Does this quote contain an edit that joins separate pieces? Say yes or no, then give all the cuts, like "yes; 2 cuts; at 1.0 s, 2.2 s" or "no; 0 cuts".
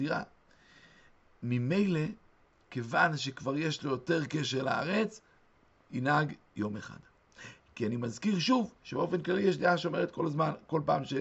no; 0 cuts